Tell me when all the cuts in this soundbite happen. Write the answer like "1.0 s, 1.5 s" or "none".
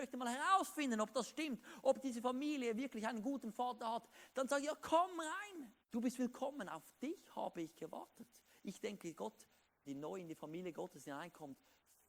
5.8 s, 9.8 s